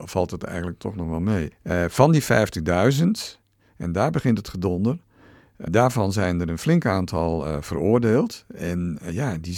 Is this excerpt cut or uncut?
cut